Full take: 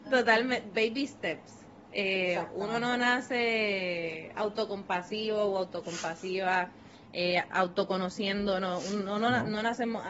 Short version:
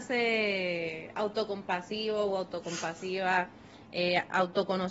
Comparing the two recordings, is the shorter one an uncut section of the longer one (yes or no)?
yes